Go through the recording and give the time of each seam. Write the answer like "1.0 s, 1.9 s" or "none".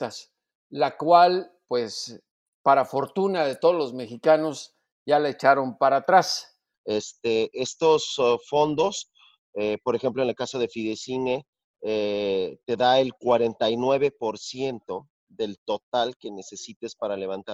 6.7 s

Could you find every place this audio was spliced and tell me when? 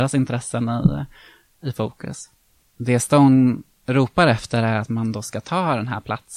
2.6 s

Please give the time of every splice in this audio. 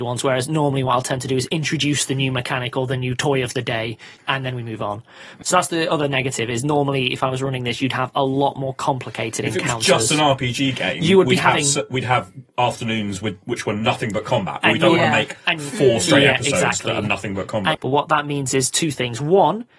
4.2 s, 5.4 s, 17.7 s

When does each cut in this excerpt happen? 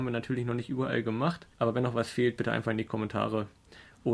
1.5 s

